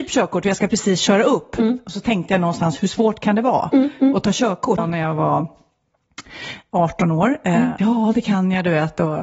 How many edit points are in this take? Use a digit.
2